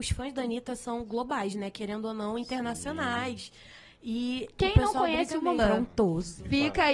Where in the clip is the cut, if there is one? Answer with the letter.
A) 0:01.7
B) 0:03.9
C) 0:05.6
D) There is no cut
C